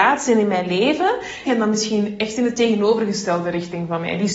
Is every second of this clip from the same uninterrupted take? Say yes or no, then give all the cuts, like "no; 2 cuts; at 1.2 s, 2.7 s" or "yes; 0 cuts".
no; 1 cut; at 1.5 s